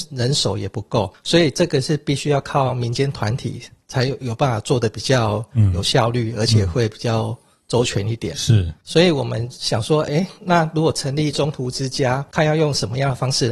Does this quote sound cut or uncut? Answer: uncut